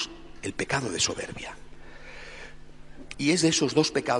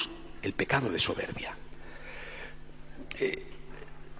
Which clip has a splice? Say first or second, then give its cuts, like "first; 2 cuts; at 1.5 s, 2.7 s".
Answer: first; 1 cut; at 3.1 s